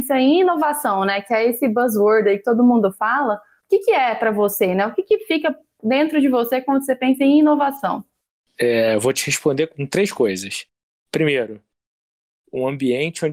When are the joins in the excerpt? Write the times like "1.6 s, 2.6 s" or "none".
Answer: none